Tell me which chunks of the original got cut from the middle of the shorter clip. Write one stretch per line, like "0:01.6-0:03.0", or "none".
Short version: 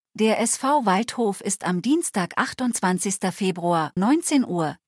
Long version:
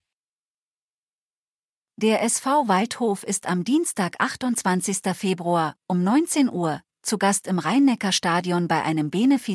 0:05.8-0:06.0